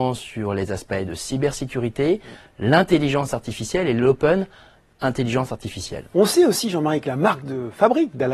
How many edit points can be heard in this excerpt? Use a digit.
1